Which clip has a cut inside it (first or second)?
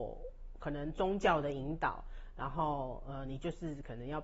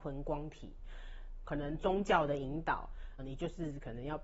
second